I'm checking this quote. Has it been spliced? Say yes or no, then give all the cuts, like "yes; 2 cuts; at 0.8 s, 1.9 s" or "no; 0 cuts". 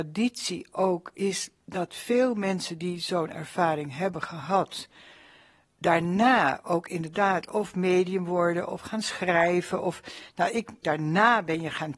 yes; 1 cut; at 10.8 s